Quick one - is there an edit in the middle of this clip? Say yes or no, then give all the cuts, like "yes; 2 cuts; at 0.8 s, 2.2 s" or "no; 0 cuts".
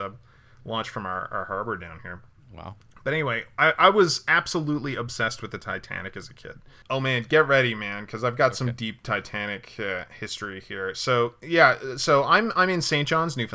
yes; 1 cut; at 6.8 s